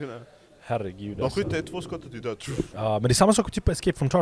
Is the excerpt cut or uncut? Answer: uncut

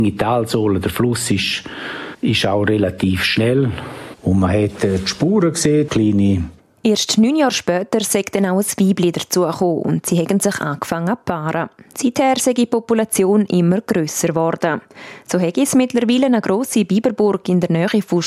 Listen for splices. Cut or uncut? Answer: cut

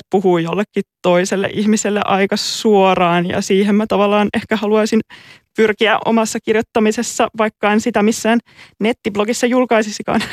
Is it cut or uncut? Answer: uncut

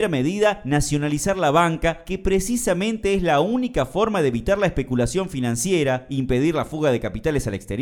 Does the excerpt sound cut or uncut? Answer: uncut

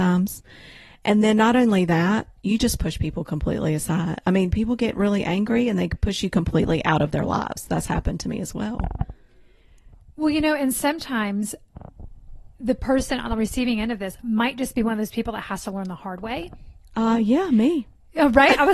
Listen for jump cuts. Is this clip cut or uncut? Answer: uncut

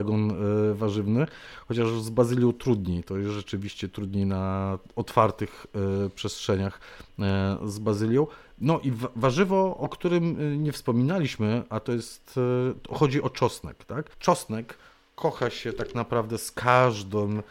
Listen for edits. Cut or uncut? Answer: cut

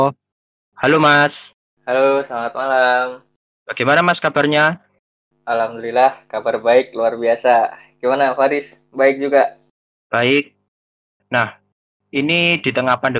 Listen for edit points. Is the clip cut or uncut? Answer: cut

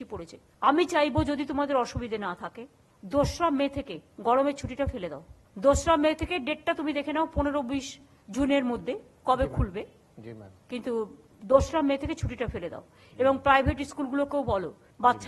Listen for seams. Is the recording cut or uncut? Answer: uncut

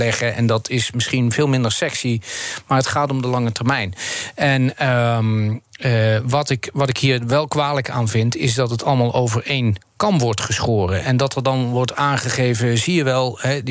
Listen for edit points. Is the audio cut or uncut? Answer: uncut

